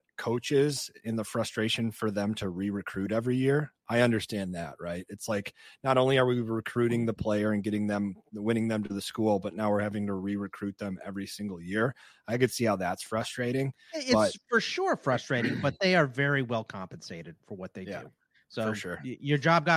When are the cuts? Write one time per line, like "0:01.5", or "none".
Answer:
none

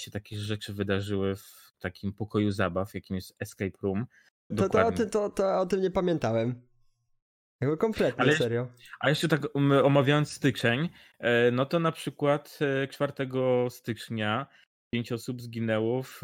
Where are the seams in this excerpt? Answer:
0:04.5

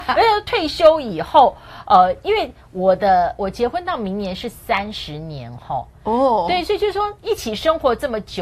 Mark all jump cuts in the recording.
none

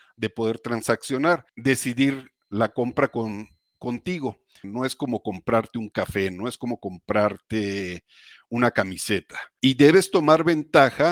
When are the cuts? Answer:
0:04.6
0:09.6

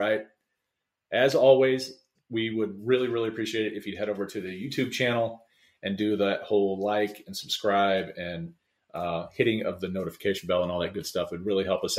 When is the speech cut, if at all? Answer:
0:02.1

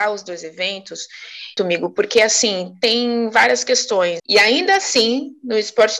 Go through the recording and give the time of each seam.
0:01.6
0:04.2

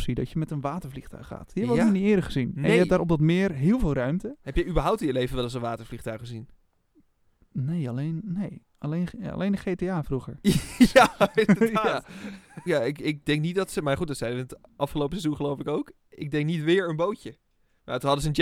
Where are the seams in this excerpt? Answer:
0:12.7

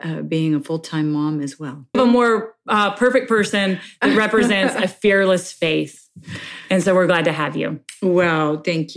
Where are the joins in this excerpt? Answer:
0:01.9

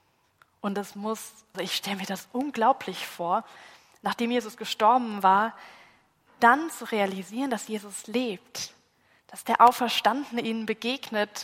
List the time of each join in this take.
0:01.5

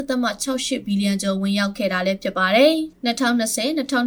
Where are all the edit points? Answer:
0:02.9

